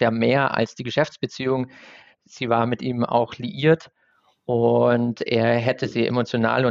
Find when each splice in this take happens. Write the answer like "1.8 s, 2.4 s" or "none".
none